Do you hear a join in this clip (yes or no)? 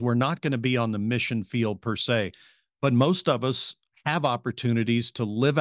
no